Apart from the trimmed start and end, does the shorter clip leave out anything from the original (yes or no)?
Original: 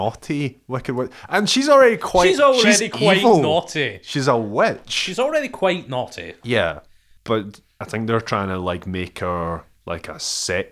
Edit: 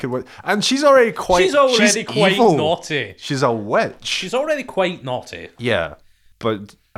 no